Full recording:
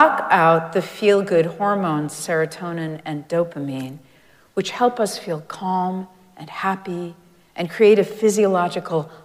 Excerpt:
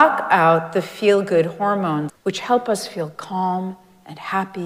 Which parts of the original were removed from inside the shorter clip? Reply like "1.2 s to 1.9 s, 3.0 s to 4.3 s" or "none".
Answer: 2.1 s to 4.4 s